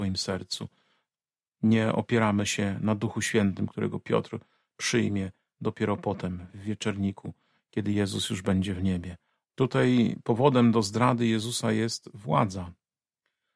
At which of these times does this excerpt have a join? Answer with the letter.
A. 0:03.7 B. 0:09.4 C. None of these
B